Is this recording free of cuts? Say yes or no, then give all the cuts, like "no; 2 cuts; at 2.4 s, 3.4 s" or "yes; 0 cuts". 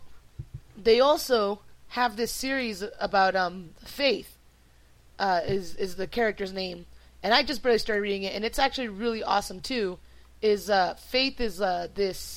yes; 0 cuts